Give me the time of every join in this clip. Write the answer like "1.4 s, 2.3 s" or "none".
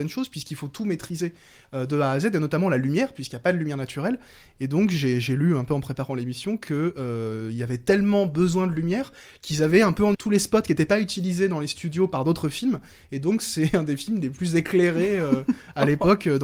10.1 s

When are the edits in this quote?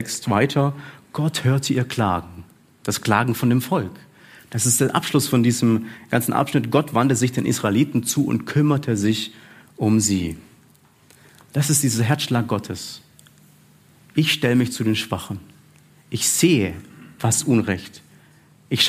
none

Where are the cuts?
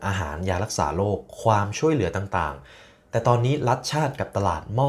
none

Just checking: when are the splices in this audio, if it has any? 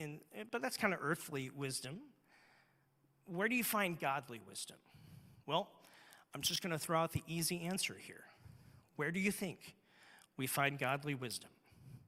none

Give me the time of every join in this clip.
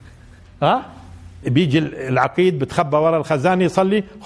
1.4 s

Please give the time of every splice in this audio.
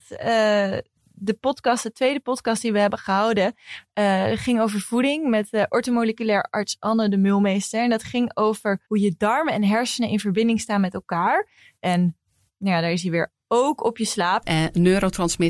8.8 s, 11.8 s, 14.4 s

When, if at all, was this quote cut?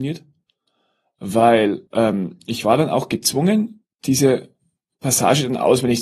1.9 s, 3.9 s

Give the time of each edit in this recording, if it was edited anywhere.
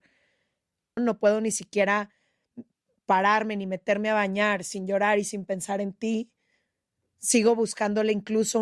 1.0 s

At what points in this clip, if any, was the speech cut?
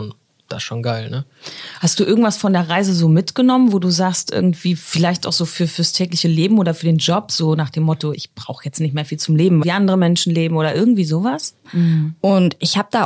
8.1 s, 9.6 s, 11.6 s

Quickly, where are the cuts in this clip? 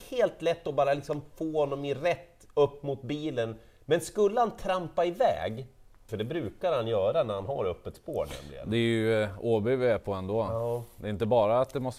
6.1 s

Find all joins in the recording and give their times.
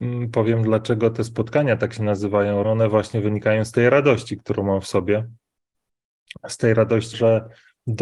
2.6 s, 7.1 s

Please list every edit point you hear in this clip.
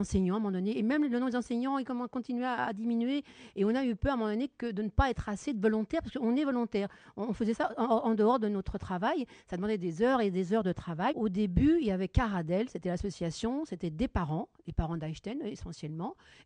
11.1 s

